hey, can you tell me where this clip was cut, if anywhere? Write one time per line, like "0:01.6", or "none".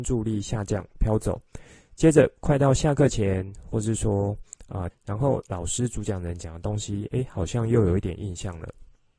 0:04.9